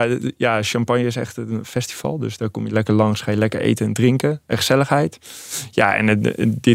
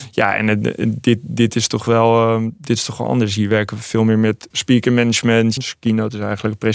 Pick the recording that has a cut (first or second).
second